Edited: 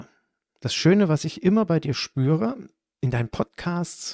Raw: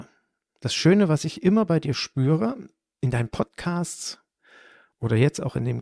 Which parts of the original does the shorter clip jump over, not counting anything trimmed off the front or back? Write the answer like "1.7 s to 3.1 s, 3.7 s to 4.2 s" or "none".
none